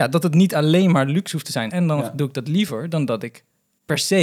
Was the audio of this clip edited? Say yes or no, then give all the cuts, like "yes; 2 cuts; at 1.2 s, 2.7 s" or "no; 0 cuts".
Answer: yes; 1 cut; at 1.7 s